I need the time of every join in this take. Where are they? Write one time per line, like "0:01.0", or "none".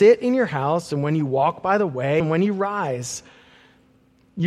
0:02.2